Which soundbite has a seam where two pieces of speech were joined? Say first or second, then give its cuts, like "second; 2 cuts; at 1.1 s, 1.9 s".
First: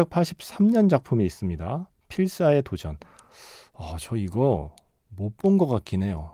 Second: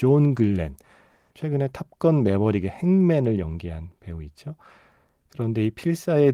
second; 1 cut; at 1.3 s